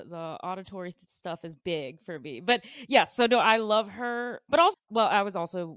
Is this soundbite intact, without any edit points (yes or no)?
no